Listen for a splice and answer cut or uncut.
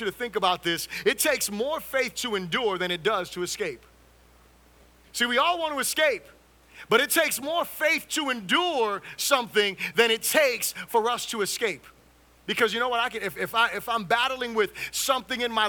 uncut